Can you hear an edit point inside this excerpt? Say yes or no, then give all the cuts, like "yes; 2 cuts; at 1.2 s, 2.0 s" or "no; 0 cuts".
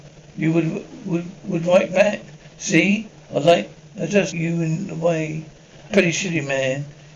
yes; 2 cuts; at 4.3 s, 5.9 s